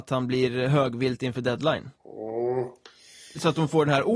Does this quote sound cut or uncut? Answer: cut